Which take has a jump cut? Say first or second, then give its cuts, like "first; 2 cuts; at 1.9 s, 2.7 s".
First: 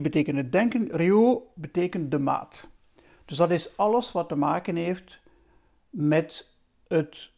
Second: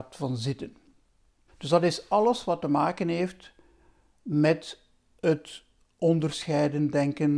second; 1 cut; at 1.5 s